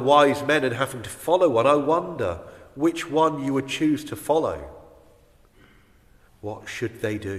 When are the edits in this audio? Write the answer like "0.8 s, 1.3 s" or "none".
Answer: 6.3 s